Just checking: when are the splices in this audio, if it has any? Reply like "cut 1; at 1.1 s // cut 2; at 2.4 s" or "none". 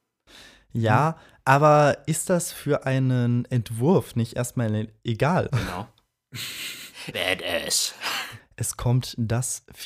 cut 1; at 5.5 s // cut 2; at 7.1 s // cut 3; at 8.4 s